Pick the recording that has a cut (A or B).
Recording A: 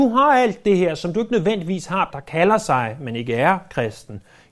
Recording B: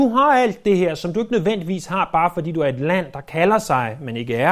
A